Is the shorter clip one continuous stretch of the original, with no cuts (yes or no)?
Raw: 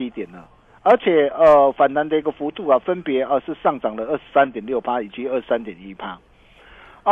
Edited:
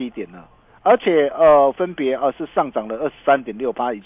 no